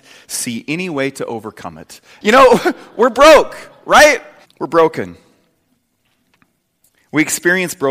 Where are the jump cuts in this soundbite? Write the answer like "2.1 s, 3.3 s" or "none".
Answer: 2.2 s, 4.4 s